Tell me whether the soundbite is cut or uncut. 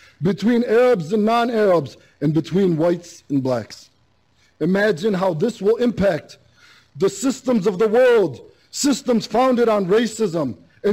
uncut